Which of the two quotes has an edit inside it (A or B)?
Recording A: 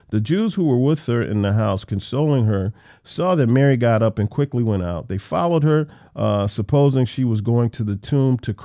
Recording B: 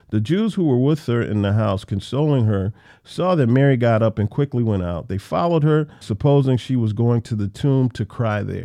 B